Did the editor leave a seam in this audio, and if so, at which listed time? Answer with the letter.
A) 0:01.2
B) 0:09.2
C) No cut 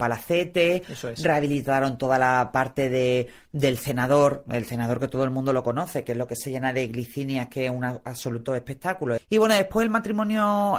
B